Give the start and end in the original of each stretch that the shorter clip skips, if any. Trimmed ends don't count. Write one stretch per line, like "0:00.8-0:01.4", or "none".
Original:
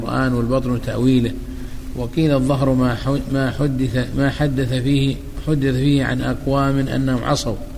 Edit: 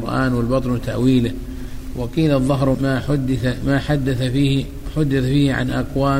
0:02.7-0:03.3